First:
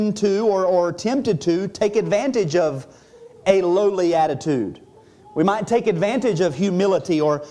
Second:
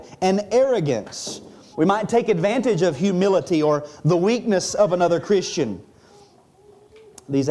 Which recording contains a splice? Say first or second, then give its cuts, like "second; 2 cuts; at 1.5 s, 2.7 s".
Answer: second; 1 cut; at 1.7 s